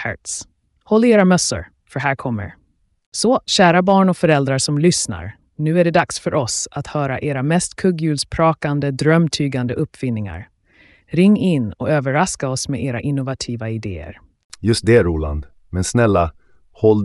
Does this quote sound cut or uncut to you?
uncut